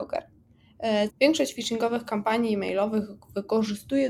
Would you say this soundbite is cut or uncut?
cut